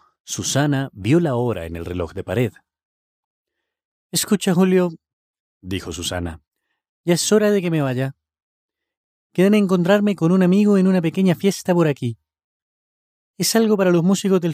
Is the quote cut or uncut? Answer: uncut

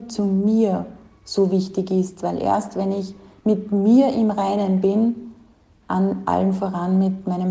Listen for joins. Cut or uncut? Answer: cut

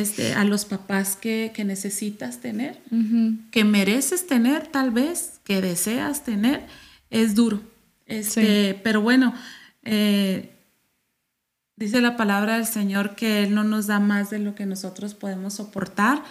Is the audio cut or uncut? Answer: uncut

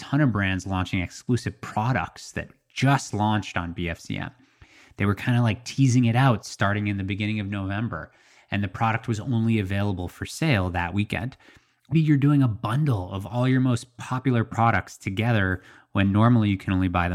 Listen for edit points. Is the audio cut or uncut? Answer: cut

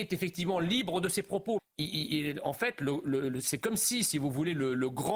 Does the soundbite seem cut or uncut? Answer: cut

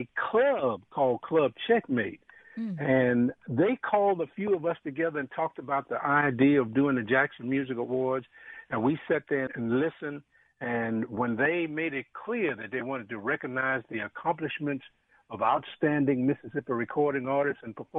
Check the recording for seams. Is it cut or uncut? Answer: cut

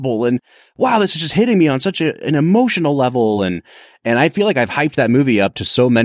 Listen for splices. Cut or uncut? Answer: uncut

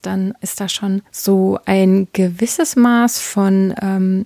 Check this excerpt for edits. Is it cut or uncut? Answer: cut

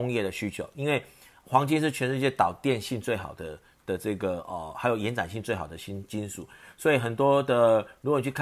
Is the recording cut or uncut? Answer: uncut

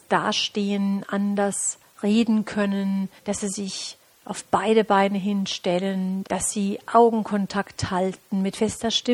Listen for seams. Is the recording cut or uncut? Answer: cut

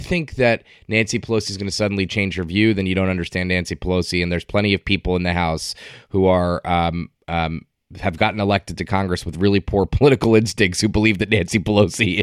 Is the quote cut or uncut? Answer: uncut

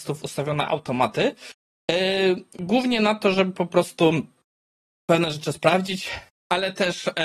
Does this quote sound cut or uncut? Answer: uncut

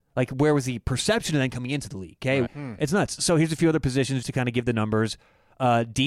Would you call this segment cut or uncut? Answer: cut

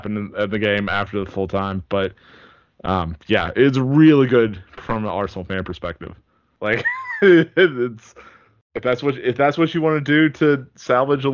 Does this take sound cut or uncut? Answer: cut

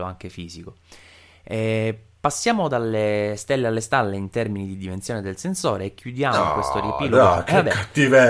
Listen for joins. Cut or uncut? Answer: uncut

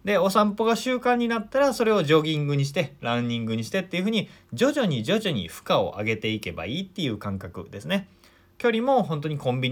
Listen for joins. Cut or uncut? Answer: uncut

